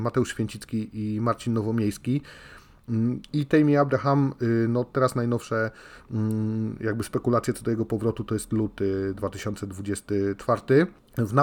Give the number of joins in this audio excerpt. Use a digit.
1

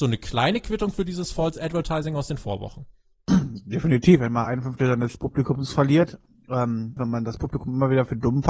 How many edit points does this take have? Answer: 2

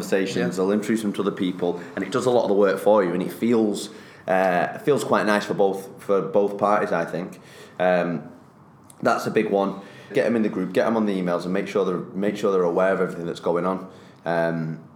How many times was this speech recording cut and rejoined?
1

